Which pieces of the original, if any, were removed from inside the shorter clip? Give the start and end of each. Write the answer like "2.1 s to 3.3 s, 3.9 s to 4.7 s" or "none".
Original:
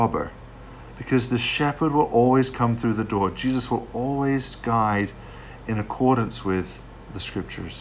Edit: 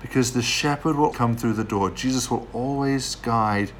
2.1 s to 2.5 s